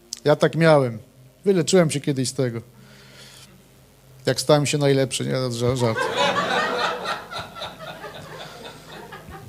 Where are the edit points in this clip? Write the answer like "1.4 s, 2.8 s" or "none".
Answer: none